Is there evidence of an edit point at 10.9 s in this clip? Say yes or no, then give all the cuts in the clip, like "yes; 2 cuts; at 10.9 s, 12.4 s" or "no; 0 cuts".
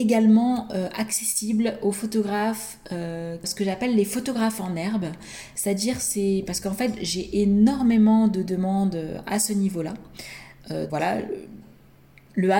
yes; 2 cuts; at 3.4 s, 10.9 s